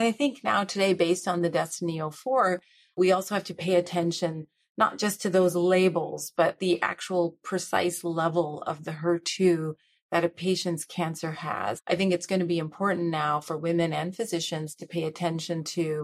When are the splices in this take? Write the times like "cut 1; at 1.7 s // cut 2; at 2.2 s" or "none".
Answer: cut 1; at 11.8 s